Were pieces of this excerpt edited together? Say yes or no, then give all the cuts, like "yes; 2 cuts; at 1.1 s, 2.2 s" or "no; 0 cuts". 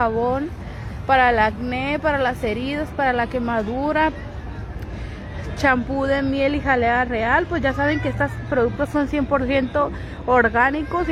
no; 0 cuts